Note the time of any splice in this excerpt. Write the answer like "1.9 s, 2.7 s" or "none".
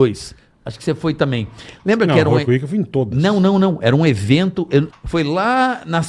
4.9 s